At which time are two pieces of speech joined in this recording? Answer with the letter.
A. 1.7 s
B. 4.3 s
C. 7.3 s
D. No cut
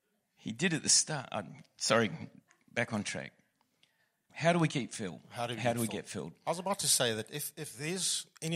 B